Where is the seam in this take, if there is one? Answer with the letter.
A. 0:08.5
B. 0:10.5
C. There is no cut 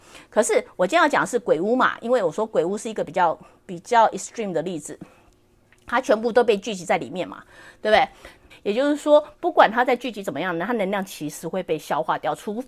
A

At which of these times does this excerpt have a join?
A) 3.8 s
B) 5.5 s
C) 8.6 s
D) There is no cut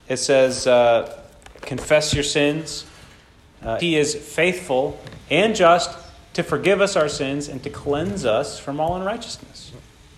A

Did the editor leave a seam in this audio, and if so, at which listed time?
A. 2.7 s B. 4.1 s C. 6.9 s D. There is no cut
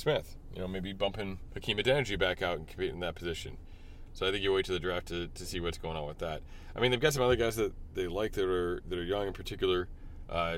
B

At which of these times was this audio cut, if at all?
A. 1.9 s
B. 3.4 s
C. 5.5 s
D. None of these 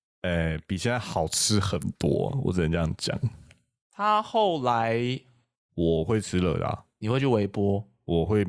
C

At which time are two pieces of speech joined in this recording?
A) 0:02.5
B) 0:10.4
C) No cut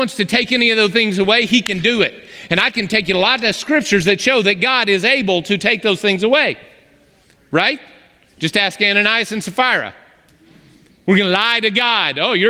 C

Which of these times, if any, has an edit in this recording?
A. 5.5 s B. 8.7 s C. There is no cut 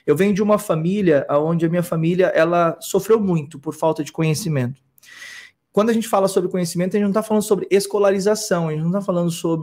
A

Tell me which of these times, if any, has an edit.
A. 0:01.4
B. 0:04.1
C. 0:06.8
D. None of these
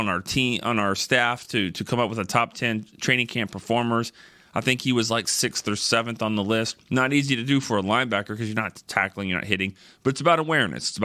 D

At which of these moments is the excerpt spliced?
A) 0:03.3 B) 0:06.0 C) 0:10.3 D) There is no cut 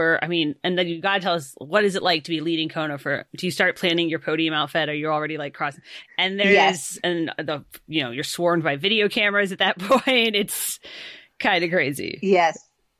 B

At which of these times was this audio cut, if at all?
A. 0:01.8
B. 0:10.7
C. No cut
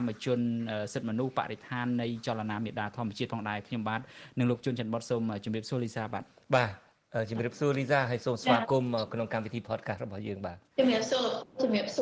B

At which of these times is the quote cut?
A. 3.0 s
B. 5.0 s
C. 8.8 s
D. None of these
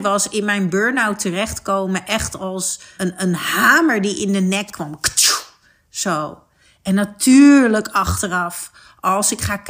A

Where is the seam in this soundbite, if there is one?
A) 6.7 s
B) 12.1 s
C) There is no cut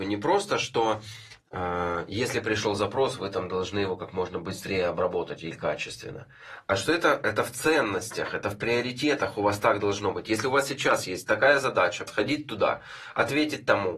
B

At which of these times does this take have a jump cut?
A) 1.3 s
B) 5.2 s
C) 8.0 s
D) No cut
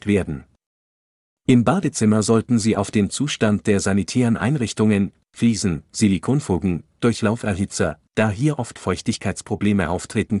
C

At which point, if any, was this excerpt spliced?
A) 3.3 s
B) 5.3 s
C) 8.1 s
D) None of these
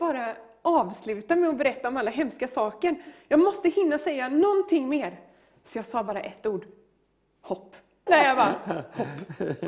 C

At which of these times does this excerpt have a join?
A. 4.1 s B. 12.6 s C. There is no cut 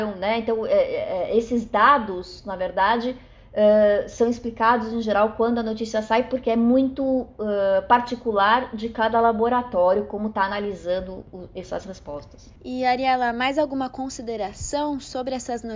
B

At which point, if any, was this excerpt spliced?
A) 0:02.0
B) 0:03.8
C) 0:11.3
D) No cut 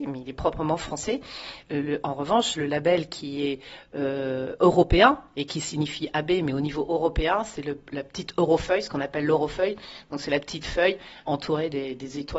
C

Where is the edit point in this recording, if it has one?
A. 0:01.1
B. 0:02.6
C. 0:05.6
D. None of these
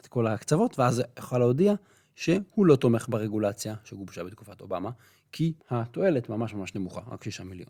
C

